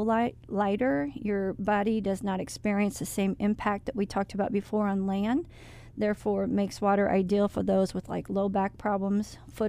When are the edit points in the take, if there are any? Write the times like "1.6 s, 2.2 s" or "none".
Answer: none